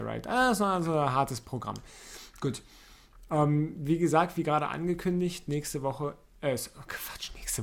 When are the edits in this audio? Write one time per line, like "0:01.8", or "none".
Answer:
none